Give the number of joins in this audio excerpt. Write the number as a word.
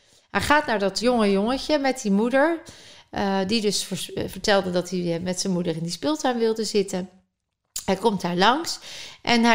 one